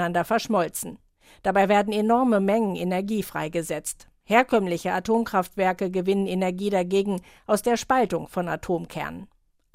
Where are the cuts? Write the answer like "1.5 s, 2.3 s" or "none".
none